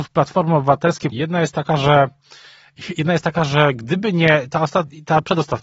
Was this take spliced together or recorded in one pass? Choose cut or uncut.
cut